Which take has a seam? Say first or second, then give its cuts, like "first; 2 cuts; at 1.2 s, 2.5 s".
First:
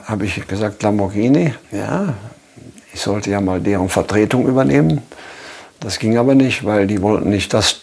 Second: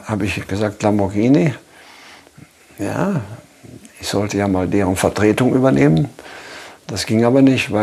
first; 1 cut; at 1.6 s